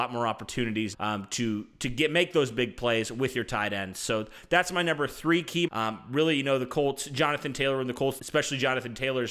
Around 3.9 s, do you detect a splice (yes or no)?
no